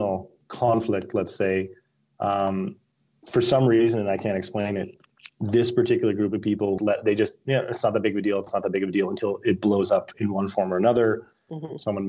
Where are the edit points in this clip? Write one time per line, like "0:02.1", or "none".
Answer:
0:06.8